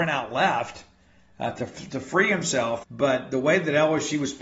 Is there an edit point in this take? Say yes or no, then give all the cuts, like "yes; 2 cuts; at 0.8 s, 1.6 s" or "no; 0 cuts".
yes; 1 cut; at 2.8 s